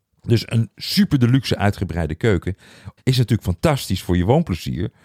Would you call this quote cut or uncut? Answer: cut